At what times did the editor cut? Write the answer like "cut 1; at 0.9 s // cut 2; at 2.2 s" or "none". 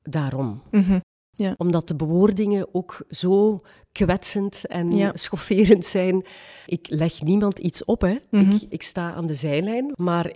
none